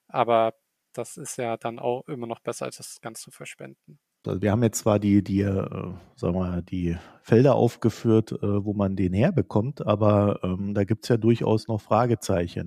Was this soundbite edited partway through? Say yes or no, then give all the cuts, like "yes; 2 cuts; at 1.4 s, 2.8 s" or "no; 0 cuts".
yes; 1 cut; at 4.2 s